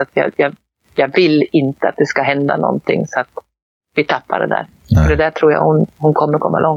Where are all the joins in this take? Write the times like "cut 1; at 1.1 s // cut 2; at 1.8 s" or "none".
none